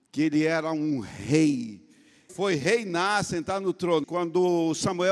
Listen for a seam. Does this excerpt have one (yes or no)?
yes